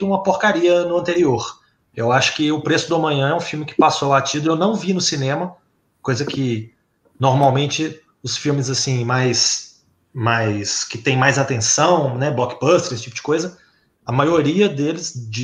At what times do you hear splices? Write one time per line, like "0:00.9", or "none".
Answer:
0:01.9